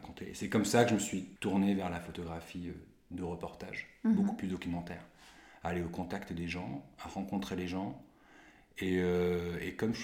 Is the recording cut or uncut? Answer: uncut